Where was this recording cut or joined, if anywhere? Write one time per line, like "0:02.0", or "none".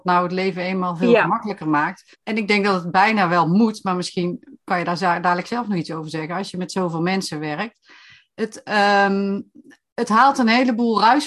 0:02.1

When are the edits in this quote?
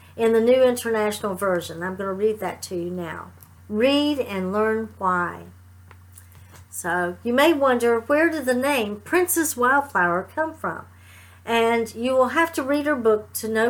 0:03.6

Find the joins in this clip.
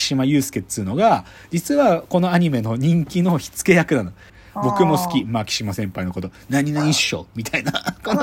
0:04.3

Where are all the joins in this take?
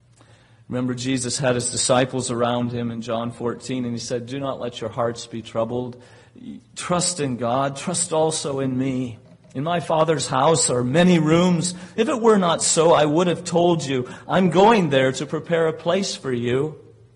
none

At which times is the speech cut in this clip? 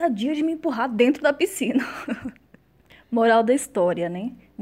none

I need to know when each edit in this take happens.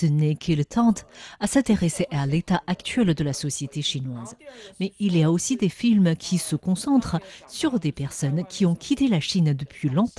none

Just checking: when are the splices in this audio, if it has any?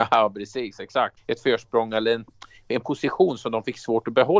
0:01.2

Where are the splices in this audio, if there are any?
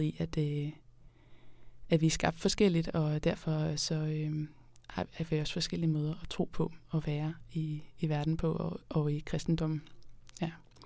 0:04.8

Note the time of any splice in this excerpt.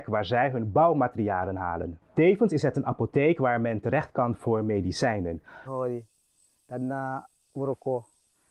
0:05.7

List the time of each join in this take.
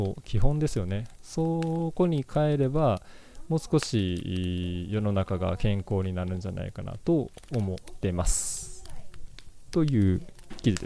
0:01.2
0:09.7

